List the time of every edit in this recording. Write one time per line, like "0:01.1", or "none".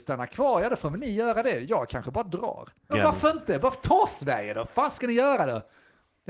0:02.9